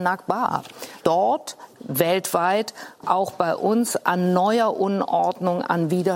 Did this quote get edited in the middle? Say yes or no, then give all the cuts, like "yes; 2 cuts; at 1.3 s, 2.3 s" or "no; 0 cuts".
yes; 1 cut; at 1.0 s